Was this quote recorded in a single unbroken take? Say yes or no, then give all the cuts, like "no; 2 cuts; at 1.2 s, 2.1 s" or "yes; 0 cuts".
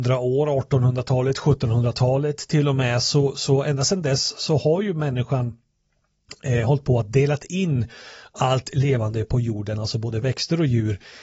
yes; 0 cuts